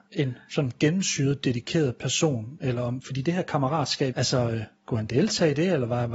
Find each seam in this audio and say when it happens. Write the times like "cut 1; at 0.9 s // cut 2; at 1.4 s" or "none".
cut 1; at 4.1 s